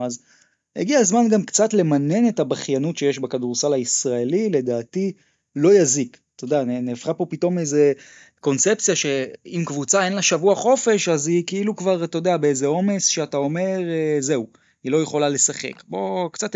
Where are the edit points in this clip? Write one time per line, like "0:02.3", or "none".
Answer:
none